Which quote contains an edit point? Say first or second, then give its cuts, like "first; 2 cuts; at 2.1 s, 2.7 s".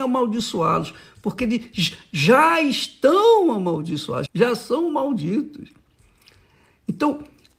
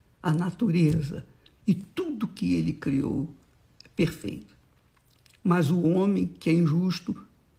first; 1 cut; at 4.3 s